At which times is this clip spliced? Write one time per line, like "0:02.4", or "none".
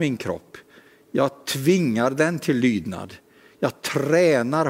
none